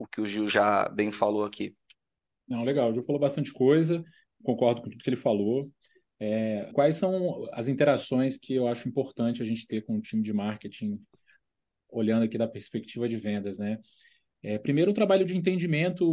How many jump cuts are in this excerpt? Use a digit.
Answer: 1